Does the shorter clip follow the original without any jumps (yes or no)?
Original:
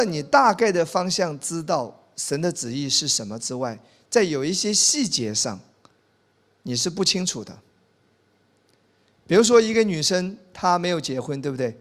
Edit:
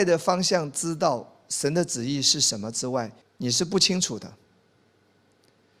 no